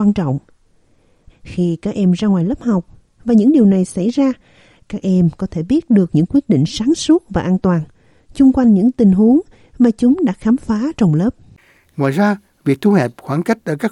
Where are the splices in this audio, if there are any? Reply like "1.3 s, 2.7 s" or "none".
1.3 s